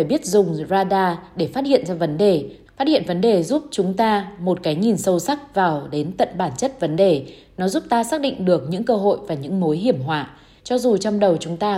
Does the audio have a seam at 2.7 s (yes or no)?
yes